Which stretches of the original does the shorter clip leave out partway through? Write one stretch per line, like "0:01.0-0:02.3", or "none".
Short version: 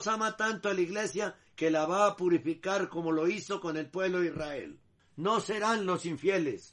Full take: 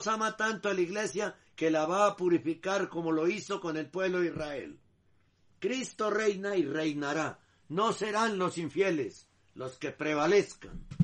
0:05.0-0:07.5